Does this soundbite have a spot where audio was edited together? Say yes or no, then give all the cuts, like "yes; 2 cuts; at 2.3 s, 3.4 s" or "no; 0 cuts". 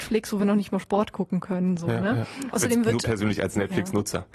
yes; 1 cut; at 2.5 s